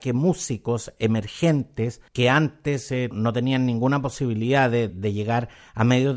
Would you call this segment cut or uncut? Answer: cut